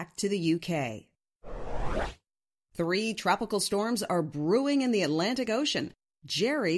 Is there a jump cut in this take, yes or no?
no